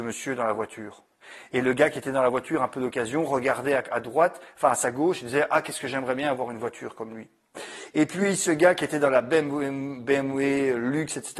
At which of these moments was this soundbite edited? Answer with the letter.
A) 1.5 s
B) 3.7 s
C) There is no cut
A